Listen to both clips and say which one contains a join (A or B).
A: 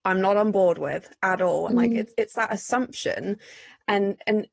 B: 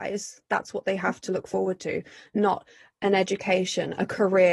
A